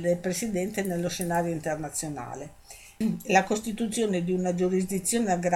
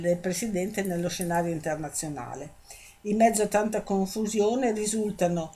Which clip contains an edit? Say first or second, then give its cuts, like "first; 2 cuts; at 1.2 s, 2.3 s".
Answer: first; 1 cut; at 3.0 s